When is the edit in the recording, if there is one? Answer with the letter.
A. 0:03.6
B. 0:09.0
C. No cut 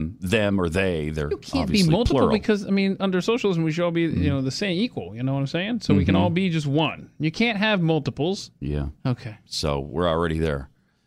B